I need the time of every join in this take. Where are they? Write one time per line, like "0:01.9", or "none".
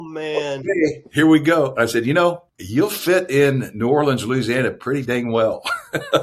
0:02.5